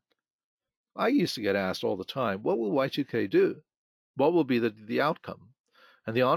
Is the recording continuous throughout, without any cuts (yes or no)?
yes